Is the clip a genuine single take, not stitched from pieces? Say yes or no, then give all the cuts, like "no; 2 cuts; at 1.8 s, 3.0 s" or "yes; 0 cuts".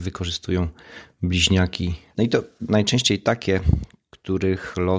no; 1 cut; at 2.1 s